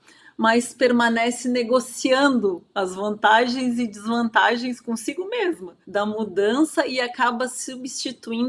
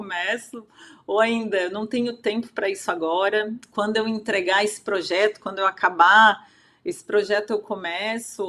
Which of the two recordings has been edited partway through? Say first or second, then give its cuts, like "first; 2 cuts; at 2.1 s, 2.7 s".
first; 1 cut; at 5.8 s